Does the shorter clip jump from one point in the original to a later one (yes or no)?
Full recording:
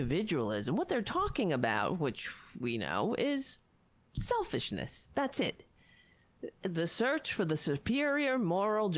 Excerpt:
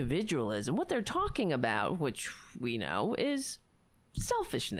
no